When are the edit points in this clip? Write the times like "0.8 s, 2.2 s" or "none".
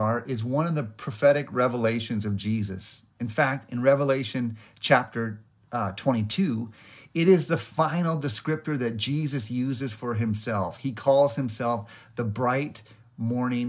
none